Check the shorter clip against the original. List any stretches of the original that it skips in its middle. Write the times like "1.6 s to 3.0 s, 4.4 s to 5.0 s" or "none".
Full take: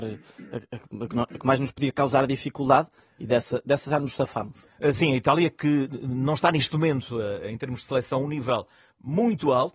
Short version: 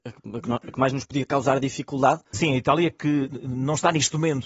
3.0 s to 4.9 s